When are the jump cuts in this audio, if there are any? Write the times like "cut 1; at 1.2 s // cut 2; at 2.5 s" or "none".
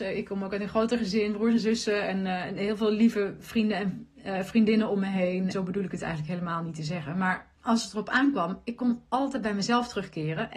cut 1; at 5.5 s // cut 2; at 7.6 s